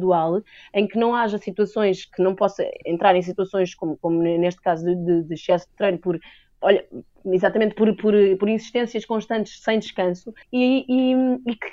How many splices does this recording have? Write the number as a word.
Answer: one